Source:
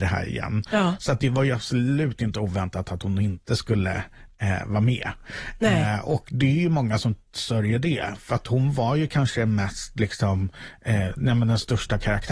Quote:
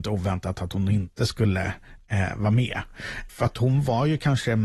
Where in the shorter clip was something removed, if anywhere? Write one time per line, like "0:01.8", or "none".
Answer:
0:03.3